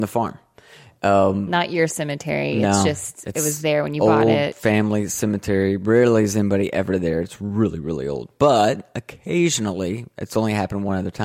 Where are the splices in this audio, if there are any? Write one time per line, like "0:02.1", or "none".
none

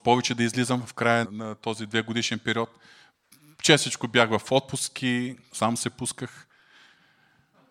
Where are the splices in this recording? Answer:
0:01.2
0:05.5

